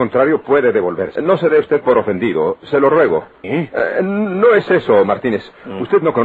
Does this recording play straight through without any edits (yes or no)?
no